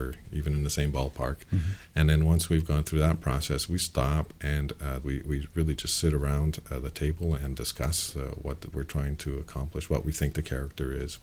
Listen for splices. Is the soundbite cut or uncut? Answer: cut